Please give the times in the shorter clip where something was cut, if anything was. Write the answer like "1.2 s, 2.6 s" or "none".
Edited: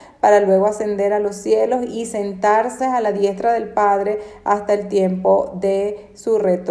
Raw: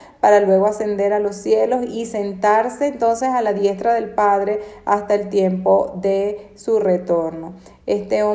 2.8 s